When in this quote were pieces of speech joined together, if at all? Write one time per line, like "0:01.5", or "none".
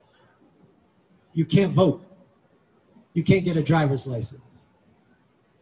none